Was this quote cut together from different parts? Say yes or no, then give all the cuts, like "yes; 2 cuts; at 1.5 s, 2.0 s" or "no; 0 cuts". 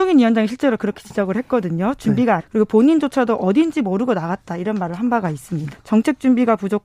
yes; 2 cuts; at 2.4 s, 5.7 s